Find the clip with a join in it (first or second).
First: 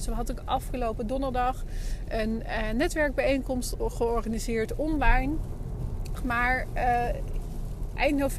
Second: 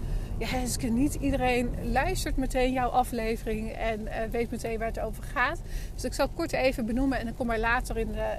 first